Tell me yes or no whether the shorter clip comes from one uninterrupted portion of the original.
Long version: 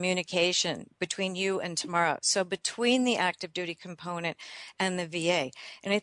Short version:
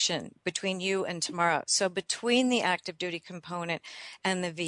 yes